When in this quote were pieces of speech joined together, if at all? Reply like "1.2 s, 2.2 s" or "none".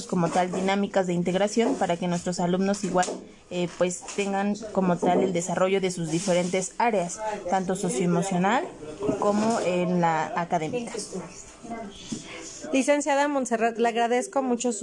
none